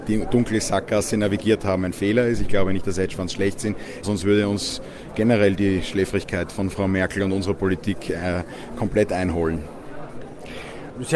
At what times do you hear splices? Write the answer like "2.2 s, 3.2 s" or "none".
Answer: 4.0 s